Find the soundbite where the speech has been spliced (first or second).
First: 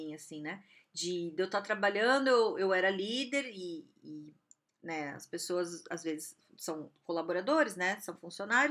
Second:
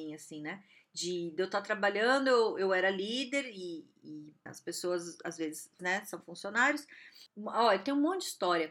second